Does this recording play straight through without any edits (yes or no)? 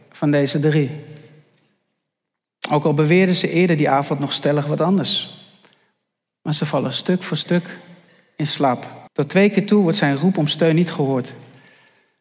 no